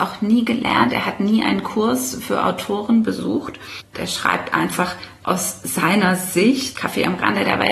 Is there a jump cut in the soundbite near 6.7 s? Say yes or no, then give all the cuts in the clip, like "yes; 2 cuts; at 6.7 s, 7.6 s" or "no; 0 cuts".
yes; 2 cuts; at 3.9 s, 6.7 s